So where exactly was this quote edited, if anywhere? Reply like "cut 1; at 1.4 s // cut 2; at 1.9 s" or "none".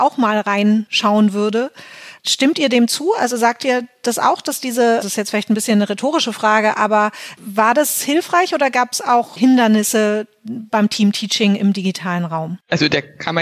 cut 1; at 5.0 s // cut 2; at 9.4 s